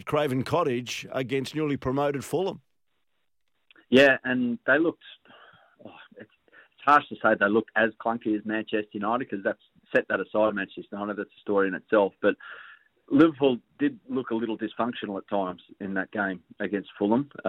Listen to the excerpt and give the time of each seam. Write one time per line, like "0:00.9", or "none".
none